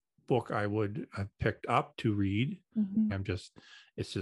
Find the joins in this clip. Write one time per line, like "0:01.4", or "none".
0:03.1